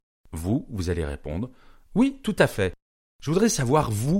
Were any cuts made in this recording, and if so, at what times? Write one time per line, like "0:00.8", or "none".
none